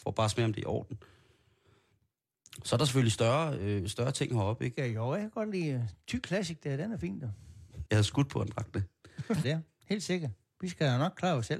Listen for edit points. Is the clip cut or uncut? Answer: cut